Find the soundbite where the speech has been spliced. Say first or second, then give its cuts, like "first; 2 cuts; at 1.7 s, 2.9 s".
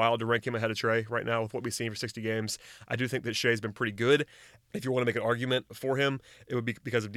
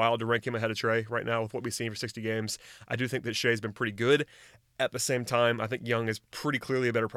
first; 1 cut; at 4.7 s